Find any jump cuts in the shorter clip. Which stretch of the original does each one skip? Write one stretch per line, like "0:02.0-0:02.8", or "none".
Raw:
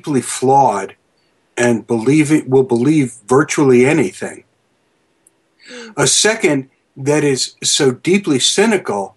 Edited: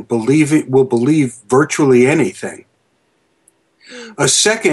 none